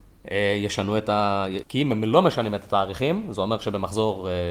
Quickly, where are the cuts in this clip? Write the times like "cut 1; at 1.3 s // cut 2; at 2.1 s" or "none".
cut 1; at 1.6 s